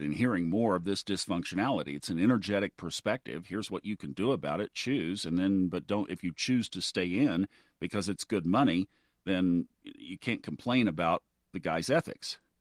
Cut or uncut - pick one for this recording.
uncut